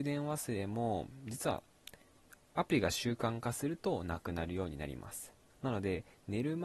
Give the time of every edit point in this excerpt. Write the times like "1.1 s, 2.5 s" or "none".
5.5 s